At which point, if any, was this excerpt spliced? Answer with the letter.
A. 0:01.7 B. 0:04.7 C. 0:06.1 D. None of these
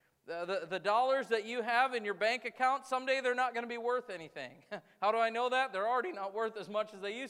D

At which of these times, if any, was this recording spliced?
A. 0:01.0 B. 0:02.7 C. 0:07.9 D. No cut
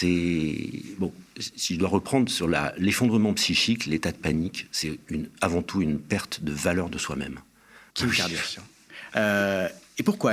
C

